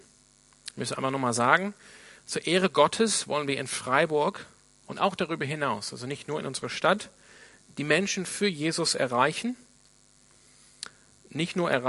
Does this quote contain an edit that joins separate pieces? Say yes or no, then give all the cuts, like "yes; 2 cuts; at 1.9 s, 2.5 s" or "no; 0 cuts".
no; 0 cuts